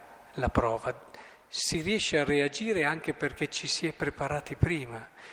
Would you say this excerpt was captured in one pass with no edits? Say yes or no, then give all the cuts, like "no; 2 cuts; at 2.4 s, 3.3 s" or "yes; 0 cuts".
yes; 0 cuts